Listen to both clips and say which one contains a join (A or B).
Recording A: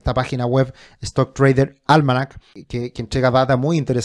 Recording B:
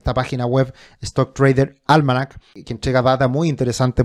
B